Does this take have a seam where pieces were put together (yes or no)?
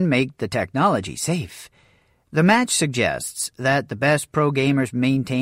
no